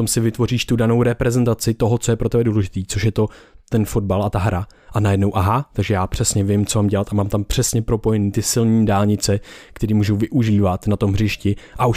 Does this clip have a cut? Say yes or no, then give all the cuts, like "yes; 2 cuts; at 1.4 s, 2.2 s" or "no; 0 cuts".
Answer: no; 0 cuts